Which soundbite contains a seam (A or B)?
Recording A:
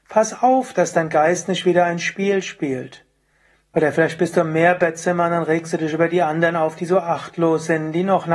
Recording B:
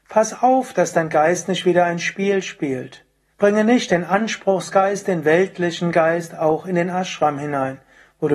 B